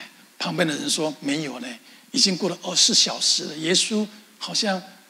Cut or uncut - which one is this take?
uncut